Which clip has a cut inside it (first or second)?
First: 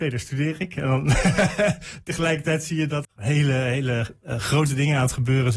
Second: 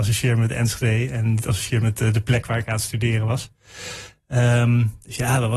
first